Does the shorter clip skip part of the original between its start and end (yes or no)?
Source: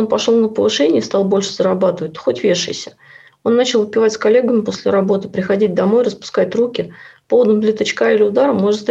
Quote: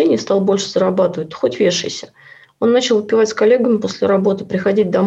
no